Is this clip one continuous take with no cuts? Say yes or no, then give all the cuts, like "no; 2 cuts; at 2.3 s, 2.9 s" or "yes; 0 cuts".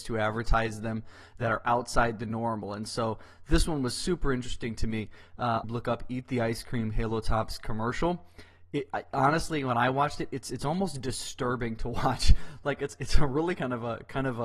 no; 1 cut; at 5.6 s